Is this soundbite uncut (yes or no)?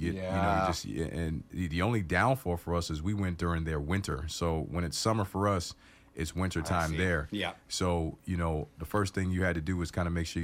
yes